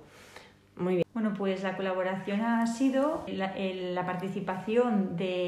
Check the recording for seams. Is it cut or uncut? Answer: cut